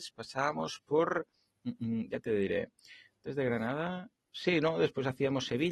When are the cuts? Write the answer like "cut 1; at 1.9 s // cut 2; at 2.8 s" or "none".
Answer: none